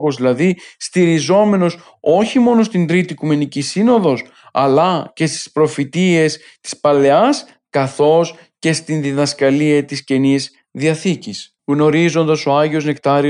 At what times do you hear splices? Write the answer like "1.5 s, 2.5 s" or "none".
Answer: 11.6 s